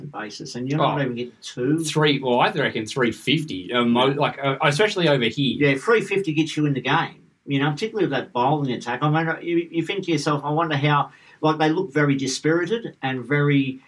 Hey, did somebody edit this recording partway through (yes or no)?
no